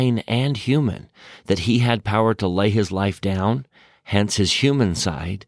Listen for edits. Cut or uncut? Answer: uncut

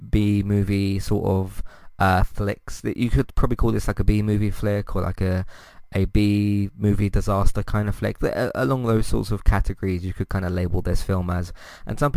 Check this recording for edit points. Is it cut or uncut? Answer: uncut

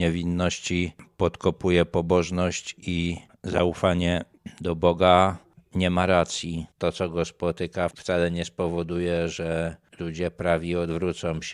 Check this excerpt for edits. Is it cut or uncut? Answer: cut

